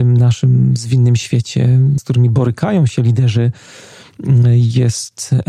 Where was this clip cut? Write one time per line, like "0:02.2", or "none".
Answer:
0:02.0